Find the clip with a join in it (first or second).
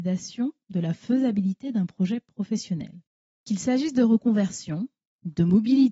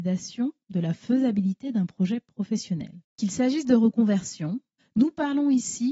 second